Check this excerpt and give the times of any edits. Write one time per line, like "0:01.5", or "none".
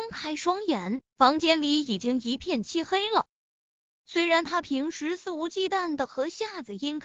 0:01.1
0:03.9